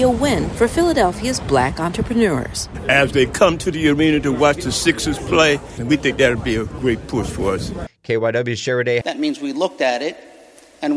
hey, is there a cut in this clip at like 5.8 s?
yes; 3 cuts; at 5.8 s, 7.9 s, 9.0 s

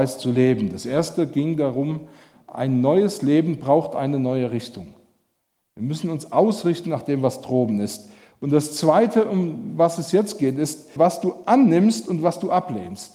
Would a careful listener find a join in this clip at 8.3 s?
no; 1 cut; at 11.0 s

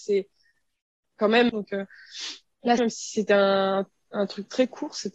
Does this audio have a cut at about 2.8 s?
yes; 2 cuts; at 1.5 s, 2.8 s

